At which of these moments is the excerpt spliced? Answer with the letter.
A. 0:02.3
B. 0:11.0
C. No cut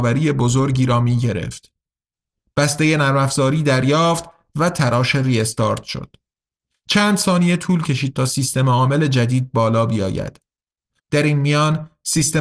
B